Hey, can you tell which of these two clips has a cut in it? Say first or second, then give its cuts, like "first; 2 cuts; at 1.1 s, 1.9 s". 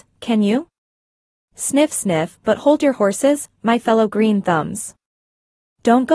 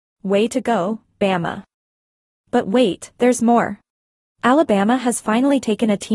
second; 1 cut; at 4.2 s